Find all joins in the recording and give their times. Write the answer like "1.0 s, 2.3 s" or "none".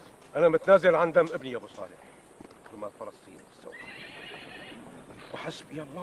2.6 s